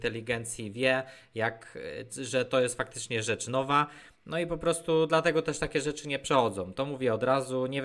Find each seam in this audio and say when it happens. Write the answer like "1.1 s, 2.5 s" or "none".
none

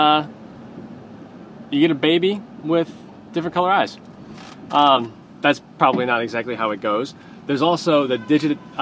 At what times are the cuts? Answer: none

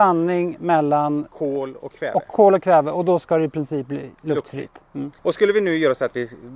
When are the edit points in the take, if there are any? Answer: 5.2 s

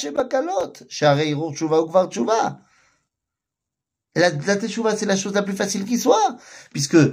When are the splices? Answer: none

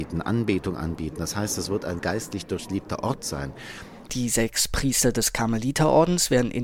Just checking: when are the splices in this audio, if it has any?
2.0 s, 4.1 s

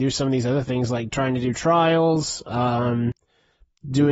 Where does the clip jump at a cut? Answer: none

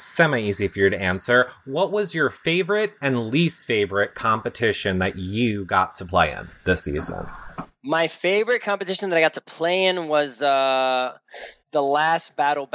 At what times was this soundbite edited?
11.6 s

